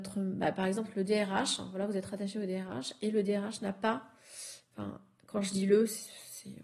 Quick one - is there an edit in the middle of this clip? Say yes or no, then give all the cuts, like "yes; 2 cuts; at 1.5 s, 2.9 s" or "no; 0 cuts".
no; 0 cuts